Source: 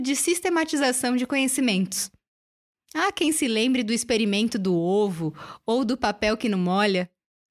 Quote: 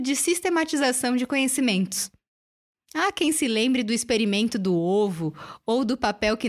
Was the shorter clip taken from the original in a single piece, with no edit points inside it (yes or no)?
yes